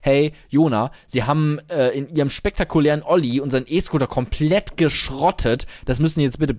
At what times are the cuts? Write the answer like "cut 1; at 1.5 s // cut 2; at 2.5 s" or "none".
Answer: none